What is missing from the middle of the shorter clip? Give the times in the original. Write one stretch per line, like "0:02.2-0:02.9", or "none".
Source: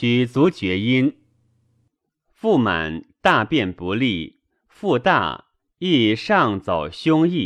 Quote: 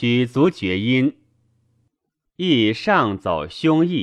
0:02.2-0:05.7